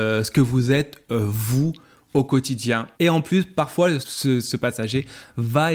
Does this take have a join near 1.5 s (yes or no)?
no